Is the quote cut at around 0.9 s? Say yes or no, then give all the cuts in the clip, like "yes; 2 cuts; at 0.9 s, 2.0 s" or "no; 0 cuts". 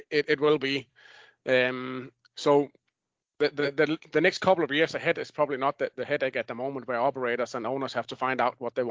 no; 0 cuts